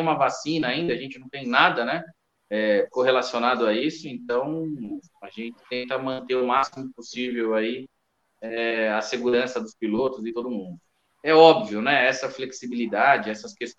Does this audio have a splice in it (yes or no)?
no